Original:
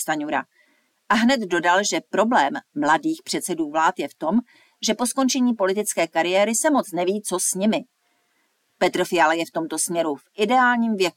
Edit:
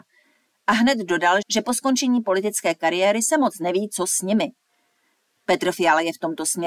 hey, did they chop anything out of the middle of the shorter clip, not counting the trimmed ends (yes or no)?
yes